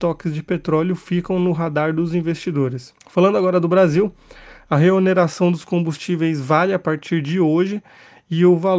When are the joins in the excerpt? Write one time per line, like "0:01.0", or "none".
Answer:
0:03.0